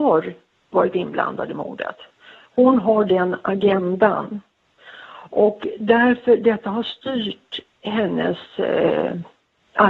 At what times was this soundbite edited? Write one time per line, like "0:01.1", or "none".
none